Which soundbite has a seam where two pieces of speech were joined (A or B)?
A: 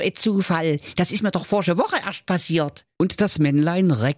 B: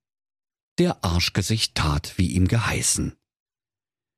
A